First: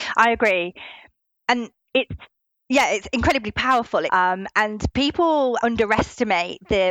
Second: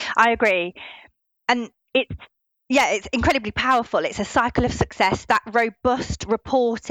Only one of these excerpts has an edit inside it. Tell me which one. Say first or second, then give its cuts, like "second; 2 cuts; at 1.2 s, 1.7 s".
first; 2 cuts; at 4.1 s, 5.6 s